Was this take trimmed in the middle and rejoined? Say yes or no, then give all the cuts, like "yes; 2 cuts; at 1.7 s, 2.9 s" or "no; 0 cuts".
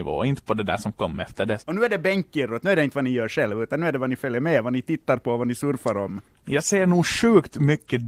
yes; 1 cut; at 1.6 s